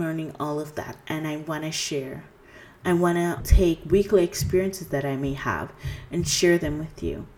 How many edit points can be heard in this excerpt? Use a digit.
1